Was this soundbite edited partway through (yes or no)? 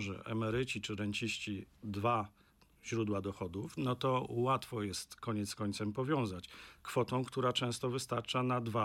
yes